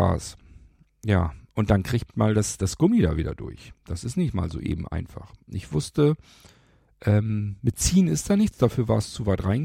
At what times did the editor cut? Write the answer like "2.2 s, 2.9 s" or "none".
none